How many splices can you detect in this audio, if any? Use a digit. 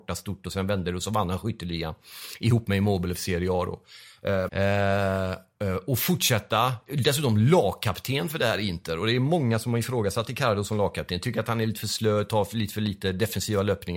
1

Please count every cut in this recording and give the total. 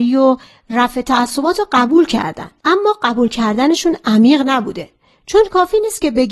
1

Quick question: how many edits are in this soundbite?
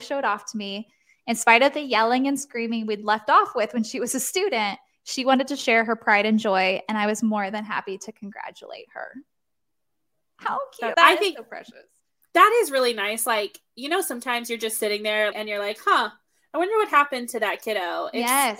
2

